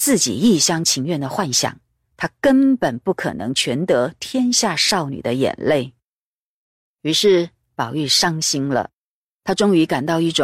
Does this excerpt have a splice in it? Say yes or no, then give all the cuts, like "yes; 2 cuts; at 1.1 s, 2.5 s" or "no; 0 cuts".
no; 0 cuts